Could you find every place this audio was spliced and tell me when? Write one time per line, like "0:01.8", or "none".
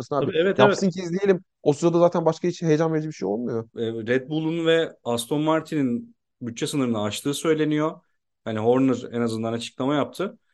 0:03.7
0:08.3